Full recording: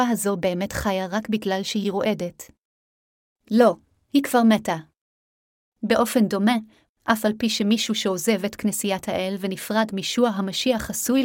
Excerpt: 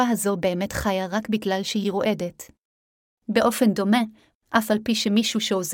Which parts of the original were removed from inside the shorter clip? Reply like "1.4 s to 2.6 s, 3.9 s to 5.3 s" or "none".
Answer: 3.1 s to 5.6 s